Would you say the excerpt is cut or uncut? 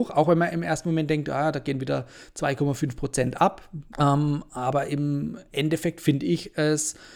cut